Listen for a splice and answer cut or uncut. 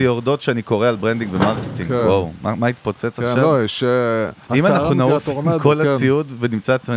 uncut